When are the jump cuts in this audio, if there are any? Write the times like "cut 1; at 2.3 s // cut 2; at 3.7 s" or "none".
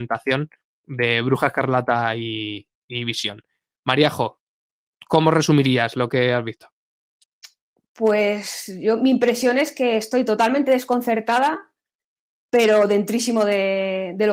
none